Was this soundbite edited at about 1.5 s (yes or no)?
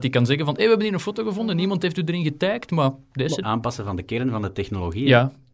no